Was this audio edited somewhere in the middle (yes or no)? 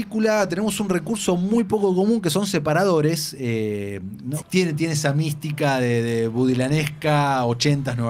yes